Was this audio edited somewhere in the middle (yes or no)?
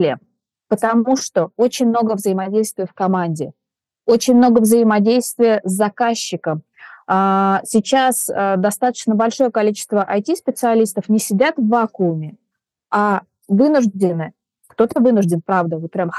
no